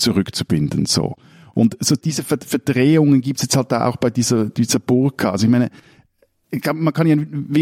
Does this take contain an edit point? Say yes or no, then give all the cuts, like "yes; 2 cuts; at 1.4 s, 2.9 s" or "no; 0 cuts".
no; 0 cuts